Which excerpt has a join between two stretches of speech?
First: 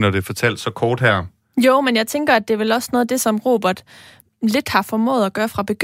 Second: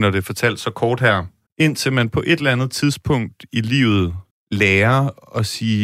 second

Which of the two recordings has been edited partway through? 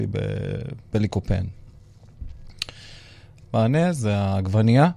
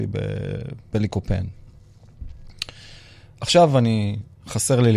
first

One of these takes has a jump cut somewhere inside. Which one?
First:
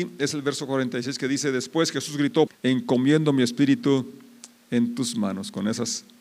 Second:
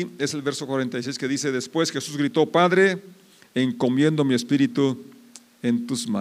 first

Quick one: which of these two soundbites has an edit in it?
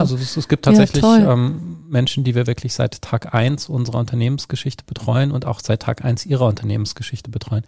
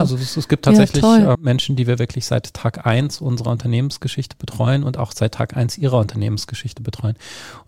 second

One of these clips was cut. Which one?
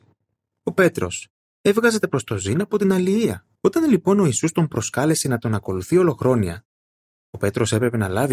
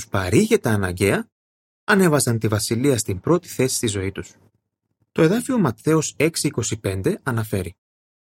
first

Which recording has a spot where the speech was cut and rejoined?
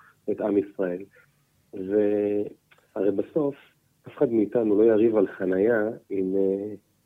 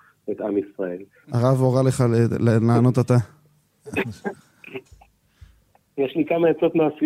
second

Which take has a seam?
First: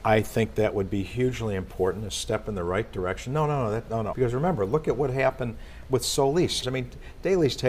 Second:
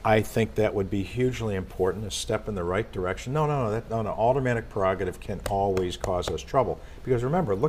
first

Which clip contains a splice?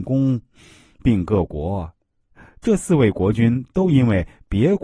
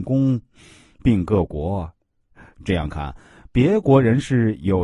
second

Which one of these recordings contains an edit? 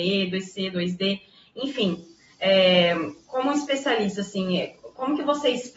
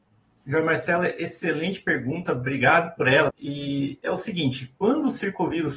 second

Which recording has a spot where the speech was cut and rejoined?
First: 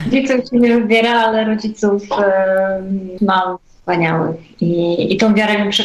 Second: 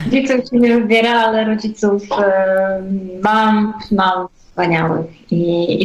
first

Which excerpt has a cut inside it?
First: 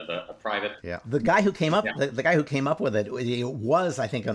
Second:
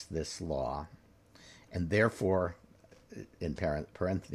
first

